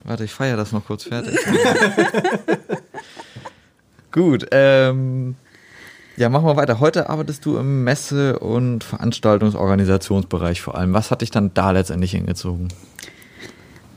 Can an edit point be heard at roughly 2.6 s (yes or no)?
no